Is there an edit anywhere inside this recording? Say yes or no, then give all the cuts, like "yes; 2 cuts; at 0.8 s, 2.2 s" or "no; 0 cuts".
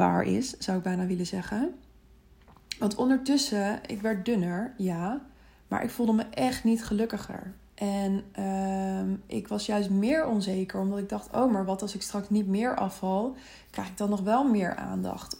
no; 0 cuts